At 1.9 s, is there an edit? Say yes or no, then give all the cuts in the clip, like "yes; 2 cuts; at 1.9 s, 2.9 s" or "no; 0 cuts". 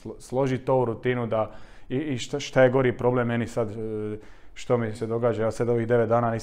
no; 1 cut; at 4.9 s